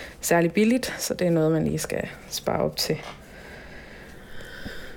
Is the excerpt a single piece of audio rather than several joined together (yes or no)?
yes